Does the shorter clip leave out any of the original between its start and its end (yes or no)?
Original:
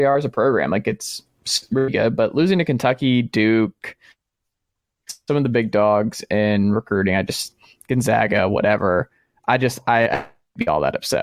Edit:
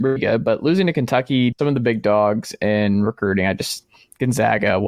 yes